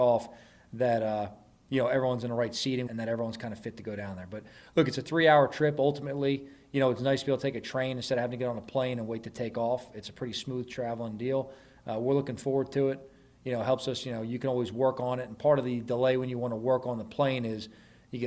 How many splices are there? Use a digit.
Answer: 1